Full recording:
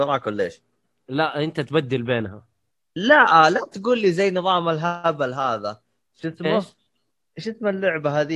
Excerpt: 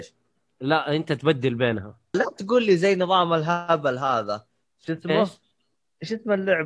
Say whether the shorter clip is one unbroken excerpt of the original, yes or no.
no